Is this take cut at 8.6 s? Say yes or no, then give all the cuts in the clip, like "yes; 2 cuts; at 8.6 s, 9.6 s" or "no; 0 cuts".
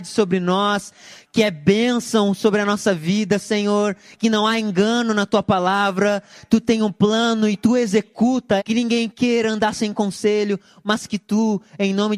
yes; 1 cut; at 8.6 s